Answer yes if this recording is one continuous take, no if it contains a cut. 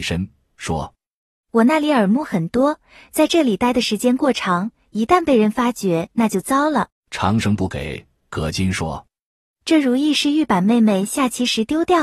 no